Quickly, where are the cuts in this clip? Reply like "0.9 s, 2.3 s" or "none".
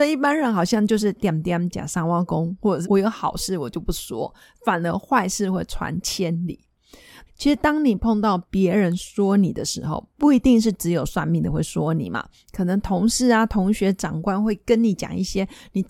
2.8 s, 7.3 s, 10.1 s